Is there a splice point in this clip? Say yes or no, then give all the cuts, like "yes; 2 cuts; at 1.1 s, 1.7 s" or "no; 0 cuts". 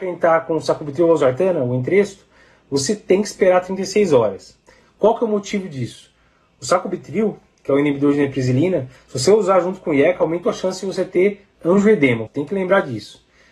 yes; 2 cuts; at 10.4 s, 12.3 s